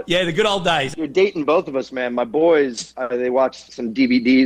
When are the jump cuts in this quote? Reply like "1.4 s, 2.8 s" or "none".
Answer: none